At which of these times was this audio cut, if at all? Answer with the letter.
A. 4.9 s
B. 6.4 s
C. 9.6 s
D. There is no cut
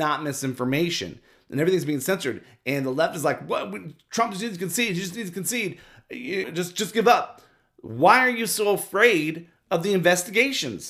B